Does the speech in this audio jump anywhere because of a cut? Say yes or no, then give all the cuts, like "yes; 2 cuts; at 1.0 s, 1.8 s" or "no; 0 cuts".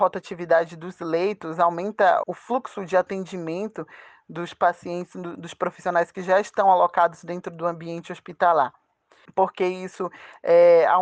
yes; 2 cuts; at 2.2 s, 9.3 s